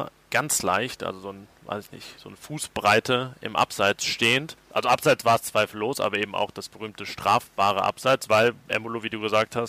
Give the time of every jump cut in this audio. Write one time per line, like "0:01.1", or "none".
0:04.7